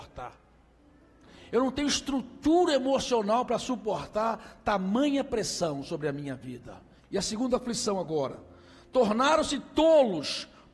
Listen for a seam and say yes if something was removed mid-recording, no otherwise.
yes